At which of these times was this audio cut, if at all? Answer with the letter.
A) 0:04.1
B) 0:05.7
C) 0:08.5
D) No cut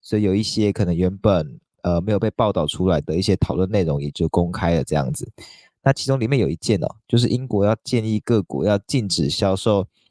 A